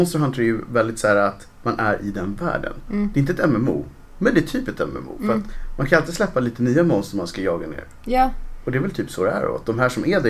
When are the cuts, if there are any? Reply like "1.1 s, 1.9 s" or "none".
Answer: none